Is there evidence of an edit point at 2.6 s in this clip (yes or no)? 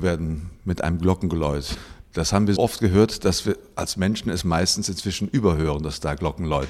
yes